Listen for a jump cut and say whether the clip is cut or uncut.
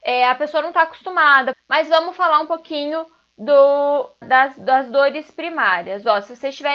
cut